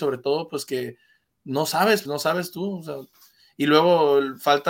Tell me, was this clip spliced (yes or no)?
yes